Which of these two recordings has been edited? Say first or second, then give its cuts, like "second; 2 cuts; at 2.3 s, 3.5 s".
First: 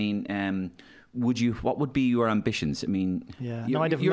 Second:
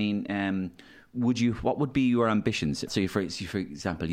second; 1 cut; at 2.9 s